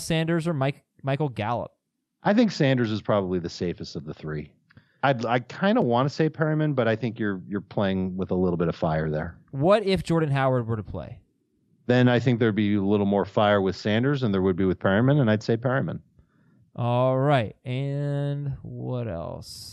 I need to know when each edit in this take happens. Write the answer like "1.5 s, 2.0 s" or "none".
none